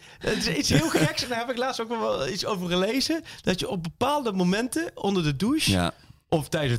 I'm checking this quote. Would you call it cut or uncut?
uncut